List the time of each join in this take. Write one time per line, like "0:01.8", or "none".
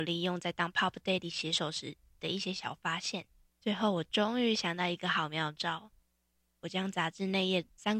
0:03.5